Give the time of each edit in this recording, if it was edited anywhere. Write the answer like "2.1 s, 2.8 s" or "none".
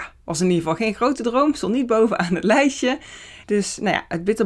3.4 s